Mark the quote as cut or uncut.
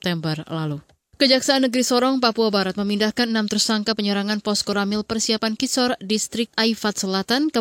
uncut